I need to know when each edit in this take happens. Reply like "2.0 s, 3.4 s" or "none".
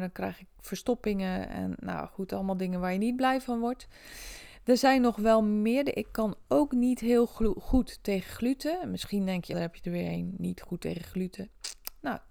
9.5 s